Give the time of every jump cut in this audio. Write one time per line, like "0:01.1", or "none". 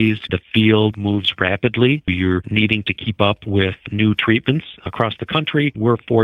0:00.9
0:02.1